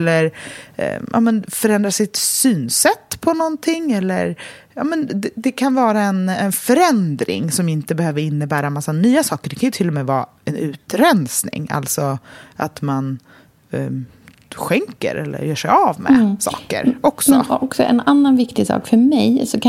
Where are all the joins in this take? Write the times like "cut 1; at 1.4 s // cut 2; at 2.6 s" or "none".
none